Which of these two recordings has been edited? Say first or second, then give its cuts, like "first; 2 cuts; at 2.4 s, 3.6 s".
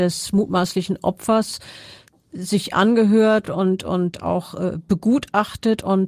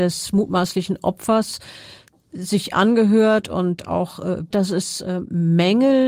second; 2 cuts; at 3.4 s, 4.5 s